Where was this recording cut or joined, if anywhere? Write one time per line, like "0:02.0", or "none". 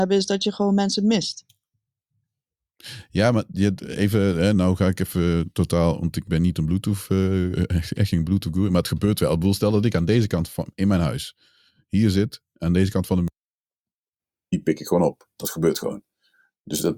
none